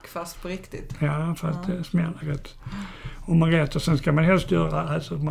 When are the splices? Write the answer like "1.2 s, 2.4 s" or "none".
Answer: 2.2 s